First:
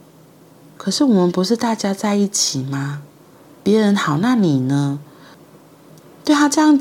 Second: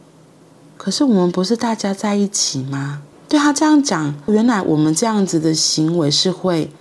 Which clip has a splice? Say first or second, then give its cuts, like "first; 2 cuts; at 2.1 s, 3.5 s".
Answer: second; 2 cuts; at 3.1 s, 4.3 s